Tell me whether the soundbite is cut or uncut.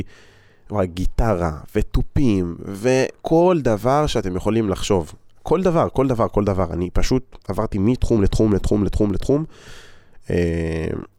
uncut